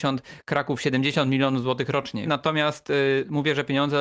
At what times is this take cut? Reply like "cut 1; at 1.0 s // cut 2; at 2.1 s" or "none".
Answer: cut 1; at 2.3 s